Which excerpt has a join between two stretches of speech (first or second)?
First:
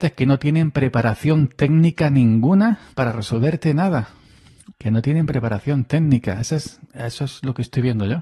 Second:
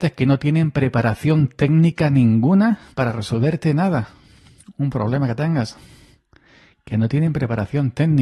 first